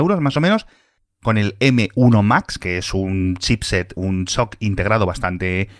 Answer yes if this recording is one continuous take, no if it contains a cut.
yes